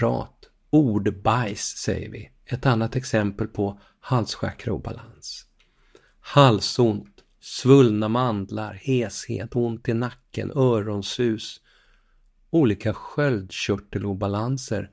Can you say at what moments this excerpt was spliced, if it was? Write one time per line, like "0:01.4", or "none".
none